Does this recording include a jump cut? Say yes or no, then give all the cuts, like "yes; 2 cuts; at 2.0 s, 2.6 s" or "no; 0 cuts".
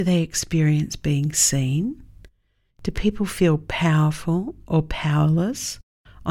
yes; 1 cut; at 2.7 s